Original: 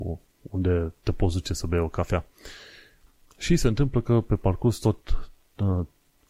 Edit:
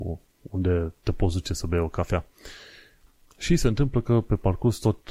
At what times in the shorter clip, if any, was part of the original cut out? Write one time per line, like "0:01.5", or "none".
none

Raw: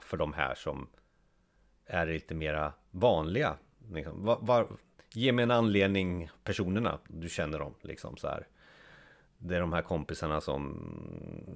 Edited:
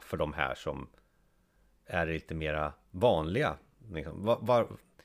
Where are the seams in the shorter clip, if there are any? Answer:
none

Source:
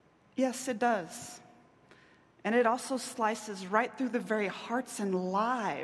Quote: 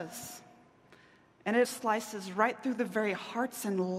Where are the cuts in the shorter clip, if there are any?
0:01.6

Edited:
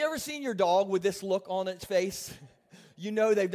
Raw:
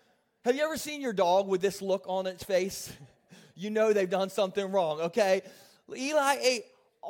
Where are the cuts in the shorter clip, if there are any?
none

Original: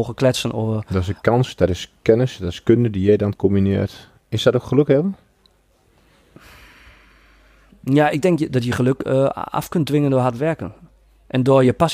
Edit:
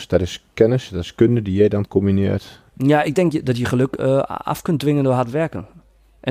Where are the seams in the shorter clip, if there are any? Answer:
0:02.7

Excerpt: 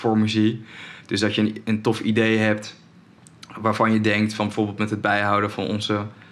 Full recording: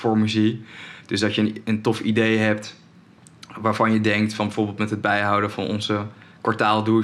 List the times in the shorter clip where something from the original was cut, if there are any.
none

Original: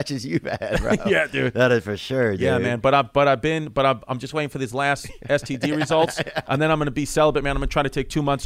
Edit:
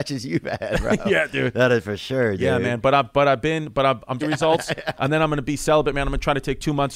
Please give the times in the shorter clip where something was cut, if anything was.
0:04.2

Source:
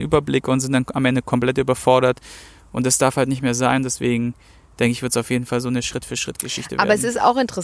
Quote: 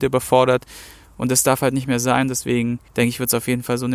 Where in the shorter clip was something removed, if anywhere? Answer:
0:02.9

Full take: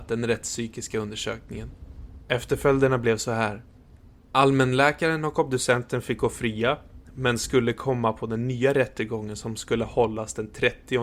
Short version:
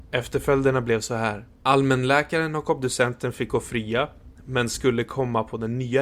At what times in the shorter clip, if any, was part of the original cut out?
0:01.5

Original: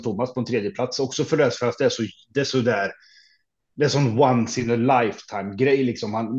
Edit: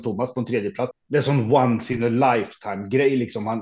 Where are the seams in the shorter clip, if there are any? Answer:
0:00.9

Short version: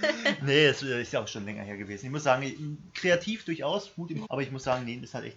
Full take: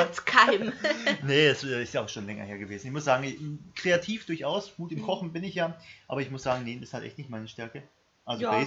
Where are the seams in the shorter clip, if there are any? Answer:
0:04.3

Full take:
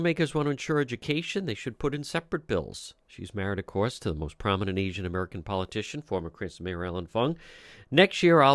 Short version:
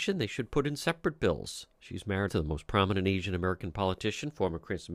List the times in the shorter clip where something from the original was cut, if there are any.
0:02.3

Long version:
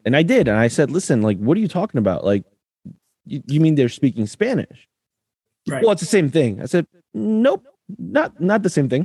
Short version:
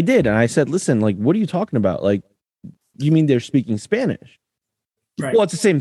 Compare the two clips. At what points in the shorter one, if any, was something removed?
0:02.9

